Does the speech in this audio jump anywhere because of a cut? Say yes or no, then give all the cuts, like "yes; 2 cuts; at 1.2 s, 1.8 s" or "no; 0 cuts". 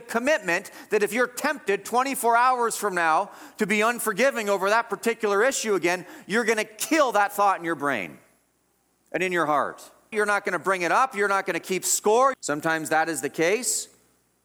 yes; 2 cuts; at 10.1 s, 12.3 s